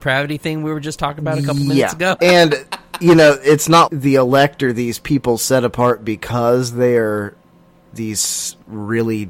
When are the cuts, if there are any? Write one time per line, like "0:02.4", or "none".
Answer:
0:02.2
0:03.9

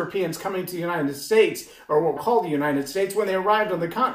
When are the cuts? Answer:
0:02.2

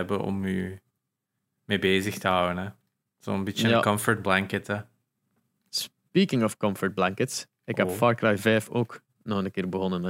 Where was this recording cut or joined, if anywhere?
none

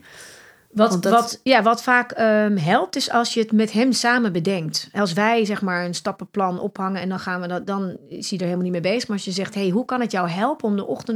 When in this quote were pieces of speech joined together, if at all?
none

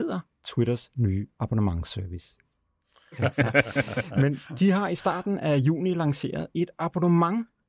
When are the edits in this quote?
0:03.1

